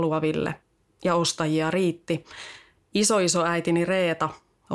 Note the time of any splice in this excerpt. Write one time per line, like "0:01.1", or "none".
0:02.7